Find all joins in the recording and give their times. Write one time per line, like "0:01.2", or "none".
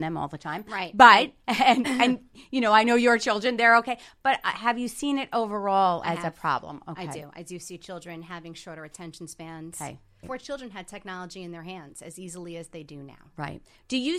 0:10.2